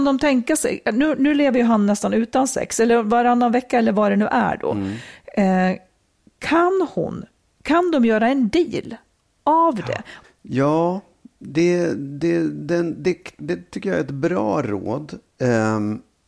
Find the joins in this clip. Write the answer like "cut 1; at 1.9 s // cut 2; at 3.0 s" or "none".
cut 1; at 10.2 s